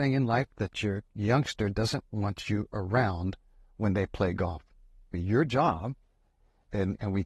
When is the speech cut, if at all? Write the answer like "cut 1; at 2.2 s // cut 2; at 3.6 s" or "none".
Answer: cut 1; at 5.1 s